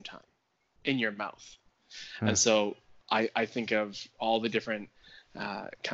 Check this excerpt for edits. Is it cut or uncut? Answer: uncut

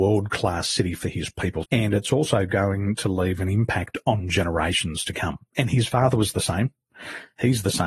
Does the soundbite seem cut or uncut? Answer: cut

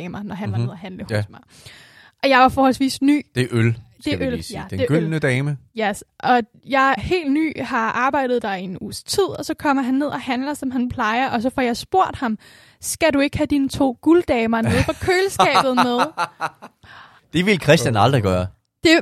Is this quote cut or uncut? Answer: cut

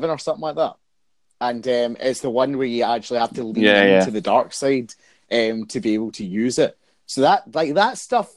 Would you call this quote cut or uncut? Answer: uncut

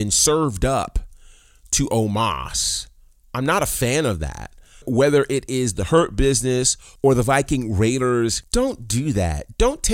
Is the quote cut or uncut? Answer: uncut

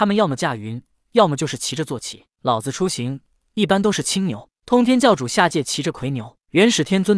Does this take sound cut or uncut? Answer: uncut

